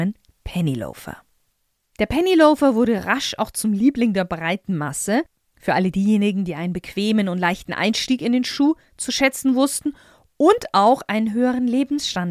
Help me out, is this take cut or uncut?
uncut